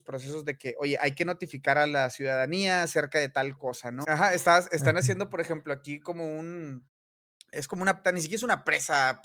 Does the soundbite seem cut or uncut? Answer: cut